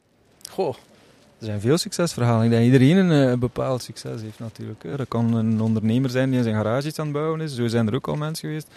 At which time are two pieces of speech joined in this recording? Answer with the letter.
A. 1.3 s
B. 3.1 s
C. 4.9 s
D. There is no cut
C